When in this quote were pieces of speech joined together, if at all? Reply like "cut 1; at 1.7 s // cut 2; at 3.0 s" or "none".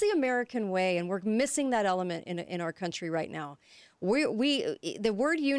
none